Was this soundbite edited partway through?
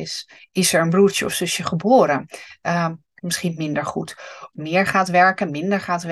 yes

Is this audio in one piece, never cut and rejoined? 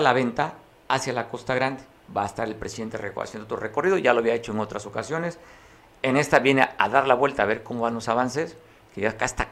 yes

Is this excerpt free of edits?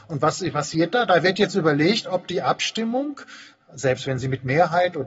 yes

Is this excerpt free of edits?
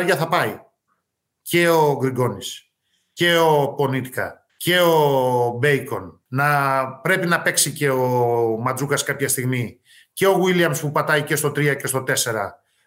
no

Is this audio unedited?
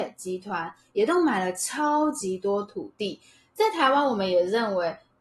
yes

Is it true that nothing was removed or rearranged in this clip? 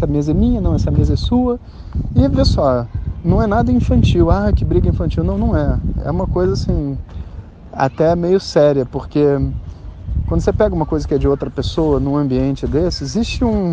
yes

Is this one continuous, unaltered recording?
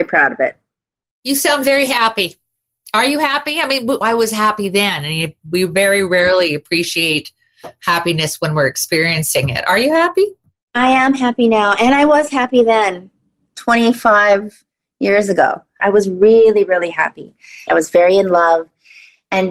no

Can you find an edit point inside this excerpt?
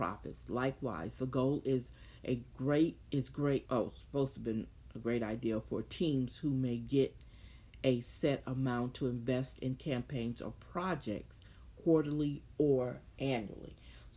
yes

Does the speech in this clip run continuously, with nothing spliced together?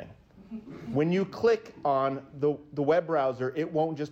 yes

